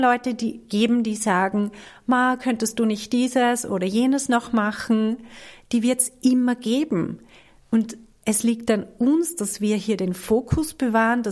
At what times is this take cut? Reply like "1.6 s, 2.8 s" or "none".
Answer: none